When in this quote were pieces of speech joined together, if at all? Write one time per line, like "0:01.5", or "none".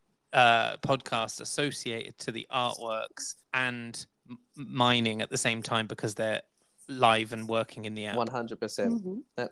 0:03.4